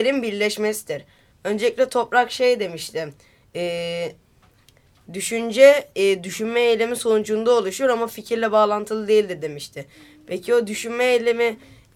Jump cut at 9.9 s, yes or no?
no